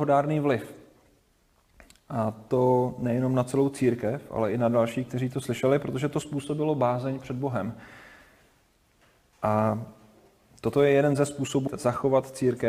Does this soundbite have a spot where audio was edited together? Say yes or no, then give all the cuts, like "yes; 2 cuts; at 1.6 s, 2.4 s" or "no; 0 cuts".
yes; 2 cuts; at 9.3 s, 11.7 s